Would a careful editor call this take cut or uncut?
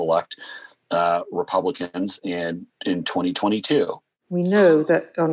uncut